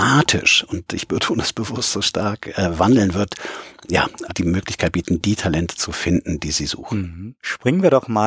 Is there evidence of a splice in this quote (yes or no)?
yes